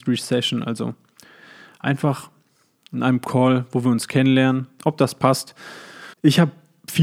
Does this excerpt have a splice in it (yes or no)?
yes